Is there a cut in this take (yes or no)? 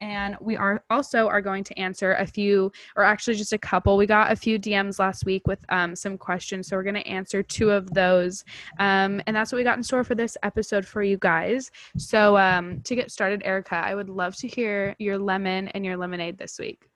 no